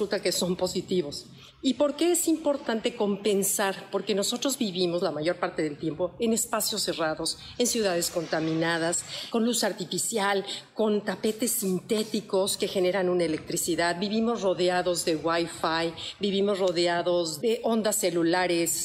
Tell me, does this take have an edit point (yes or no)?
no